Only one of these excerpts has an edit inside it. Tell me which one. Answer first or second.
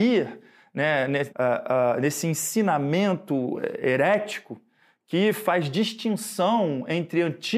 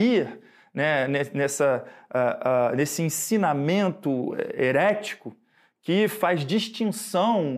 first